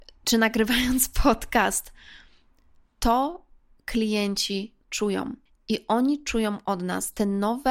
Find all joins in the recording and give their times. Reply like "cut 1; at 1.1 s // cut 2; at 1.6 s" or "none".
cut 1; at 4.8 s